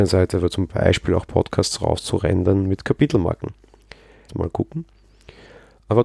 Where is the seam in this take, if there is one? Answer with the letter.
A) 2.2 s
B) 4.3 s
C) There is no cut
B